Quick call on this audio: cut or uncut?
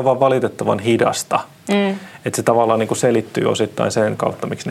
uncut